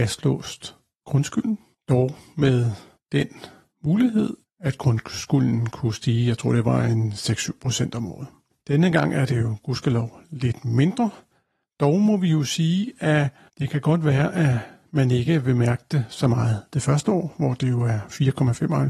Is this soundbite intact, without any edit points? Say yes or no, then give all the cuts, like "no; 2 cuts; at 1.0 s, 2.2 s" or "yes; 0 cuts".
yes; 0 cuts